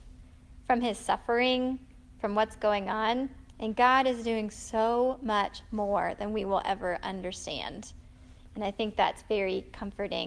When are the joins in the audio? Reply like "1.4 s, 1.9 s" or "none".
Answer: 3.5 s